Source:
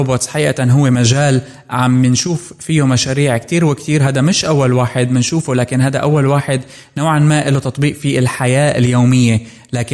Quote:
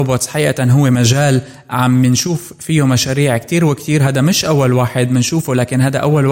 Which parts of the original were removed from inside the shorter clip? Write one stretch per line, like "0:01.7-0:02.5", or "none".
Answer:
none

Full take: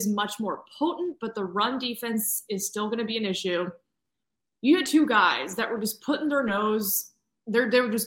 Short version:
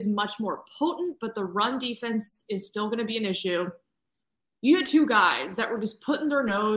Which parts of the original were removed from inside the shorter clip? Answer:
none

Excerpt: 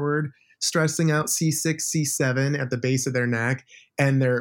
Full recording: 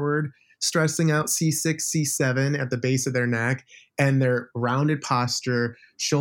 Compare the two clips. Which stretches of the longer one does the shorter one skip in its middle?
none

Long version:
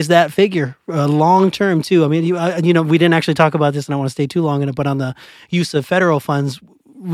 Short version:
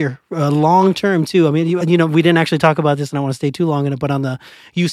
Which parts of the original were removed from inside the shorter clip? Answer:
0:02.4-0:02.6

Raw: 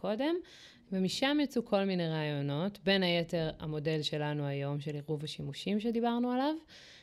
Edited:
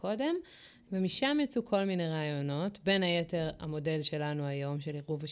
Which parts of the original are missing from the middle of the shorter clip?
none

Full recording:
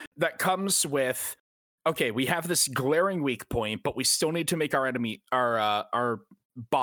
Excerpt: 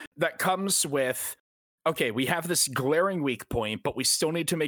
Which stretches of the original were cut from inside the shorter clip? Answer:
none

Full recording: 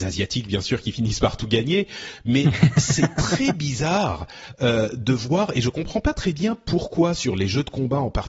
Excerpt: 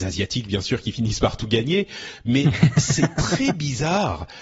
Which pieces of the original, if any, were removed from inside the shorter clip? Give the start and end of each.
none

